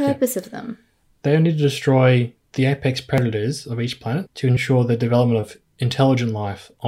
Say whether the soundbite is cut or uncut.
cut